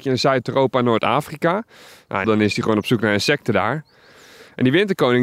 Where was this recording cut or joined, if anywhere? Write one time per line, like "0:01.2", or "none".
0:02.2